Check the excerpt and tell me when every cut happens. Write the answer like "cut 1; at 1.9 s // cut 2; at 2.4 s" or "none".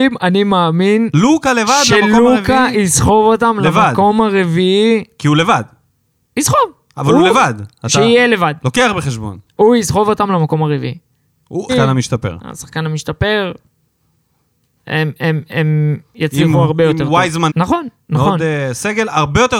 cut 1; at 11.7 s // cut 2; at 17.5 s